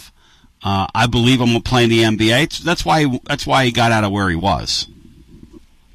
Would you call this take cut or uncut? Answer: uncut